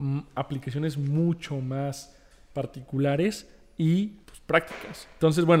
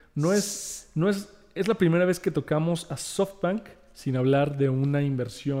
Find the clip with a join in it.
first; 1 cut; at 4.2 s

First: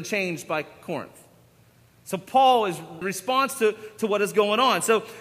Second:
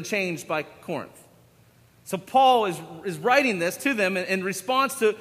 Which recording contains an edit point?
first; 1 cut; at 3.0 s

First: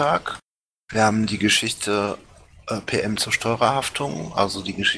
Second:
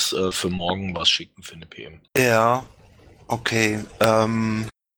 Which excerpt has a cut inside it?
second; 1 cut; at 2.1 s

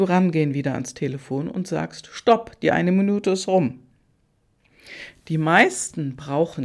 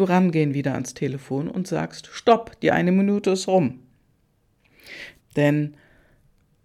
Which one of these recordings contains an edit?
second; 1 cut; at 5.2 s

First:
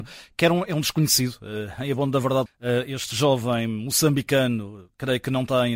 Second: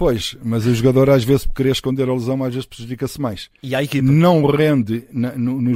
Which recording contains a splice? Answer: first; 1 cut; at 2.5 s

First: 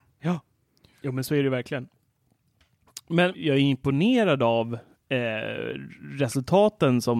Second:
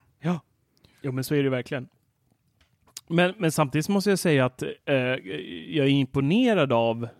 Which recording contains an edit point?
first; 1 cut; at 3.3 s

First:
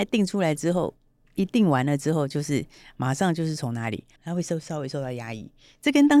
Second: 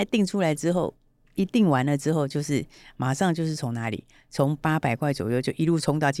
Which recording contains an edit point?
first; 1 cut; at 4.2 s

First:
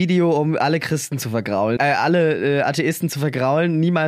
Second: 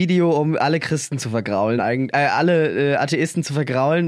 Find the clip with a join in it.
first; 1 cut; at 1.8 s

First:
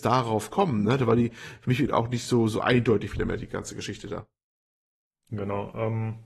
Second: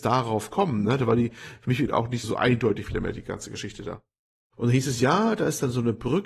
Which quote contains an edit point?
second; 2 cuts; at 2.2 s, 4.5 s

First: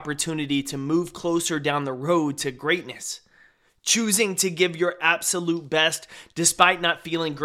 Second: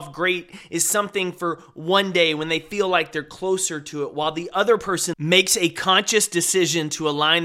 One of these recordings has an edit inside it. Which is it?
second; 1 cut; at 5.1 s

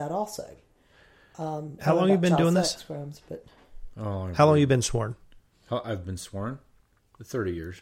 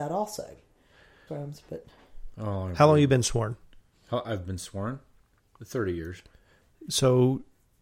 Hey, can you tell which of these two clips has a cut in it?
second; 1 cut; at 1.3 s

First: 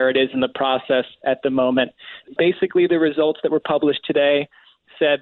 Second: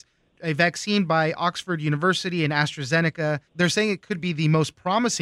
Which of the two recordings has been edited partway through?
second; 1 cut; at 3.5 s

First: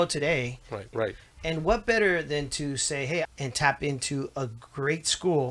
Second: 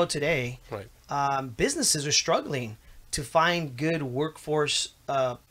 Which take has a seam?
first; 2 cuts; at 0.9 s, 3.2 s

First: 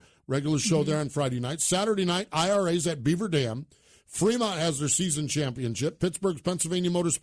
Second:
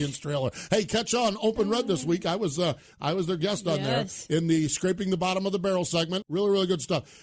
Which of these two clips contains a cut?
second; 1 cut; at 6.2 s

